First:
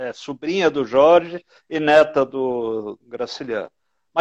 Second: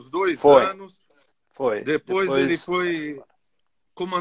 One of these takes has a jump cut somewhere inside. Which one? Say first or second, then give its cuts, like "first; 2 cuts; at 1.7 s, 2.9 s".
first; 1 cut; at 3.0 s